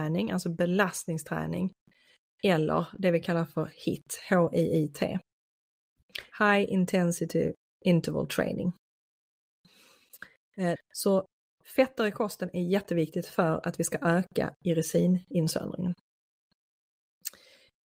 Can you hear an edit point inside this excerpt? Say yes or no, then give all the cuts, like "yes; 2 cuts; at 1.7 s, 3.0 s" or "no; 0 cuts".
yes; 2 cuts; at 6.3 s, 10.7 s